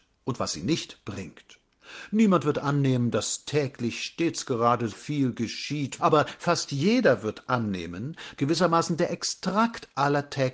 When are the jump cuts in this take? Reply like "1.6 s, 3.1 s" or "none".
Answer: 4.9 s, 6.0 s, 8.4 s